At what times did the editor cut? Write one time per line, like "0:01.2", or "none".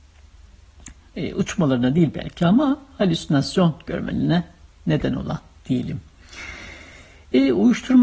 0:01.0